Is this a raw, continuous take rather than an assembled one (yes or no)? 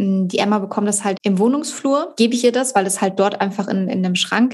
no